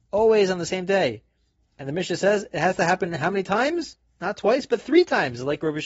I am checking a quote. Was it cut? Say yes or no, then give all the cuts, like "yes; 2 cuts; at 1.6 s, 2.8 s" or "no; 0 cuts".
no; 0 cuts